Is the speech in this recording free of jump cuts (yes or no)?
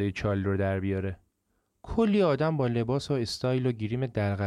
yes